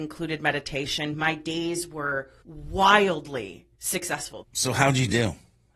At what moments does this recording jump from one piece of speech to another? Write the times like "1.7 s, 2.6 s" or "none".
4.4 s